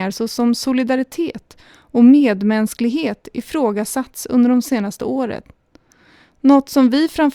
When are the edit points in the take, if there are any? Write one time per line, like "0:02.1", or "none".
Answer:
none